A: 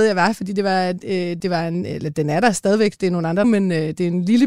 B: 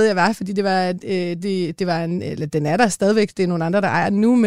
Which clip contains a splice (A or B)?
A